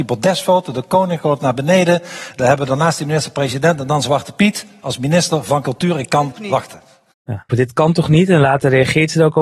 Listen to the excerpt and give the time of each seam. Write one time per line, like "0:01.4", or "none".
0:06.4
0:07.5

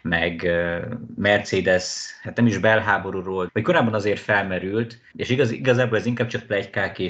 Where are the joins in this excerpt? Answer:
0:03.5
0:05.1

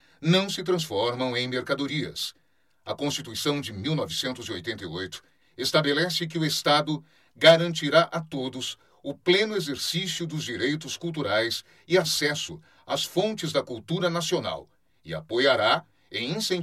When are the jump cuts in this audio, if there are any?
0:05.4

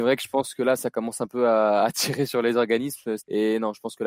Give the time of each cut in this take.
0:03.2

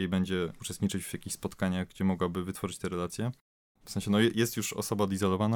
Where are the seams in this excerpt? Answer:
0:03.8

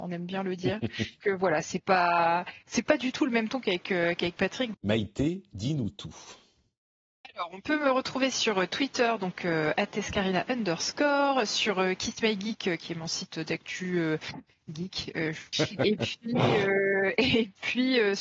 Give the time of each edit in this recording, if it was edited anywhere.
0:01.2
0:04.7
0:15.5

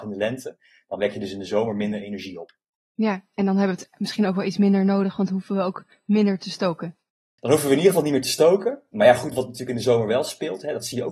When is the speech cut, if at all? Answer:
none

